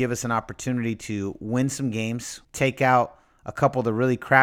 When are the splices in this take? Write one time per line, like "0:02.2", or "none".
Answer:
0:02.4